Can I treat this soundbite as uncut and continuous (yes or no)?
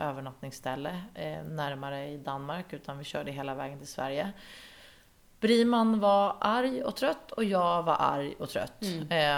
yes